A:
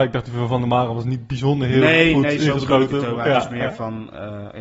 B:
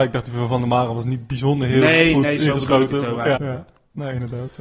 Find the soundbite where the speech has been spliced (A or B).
B